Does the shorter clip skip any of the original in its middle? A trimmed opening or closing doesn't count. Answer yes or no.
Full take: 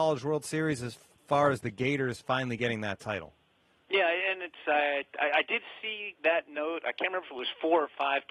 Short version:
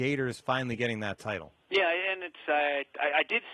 yes